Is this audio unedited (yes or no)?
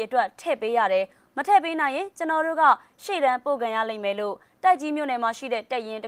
yes